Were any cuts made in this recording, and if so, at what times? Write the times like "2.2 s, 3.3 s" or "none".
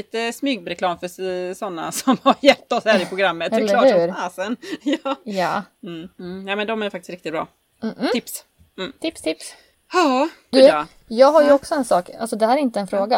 10.5 s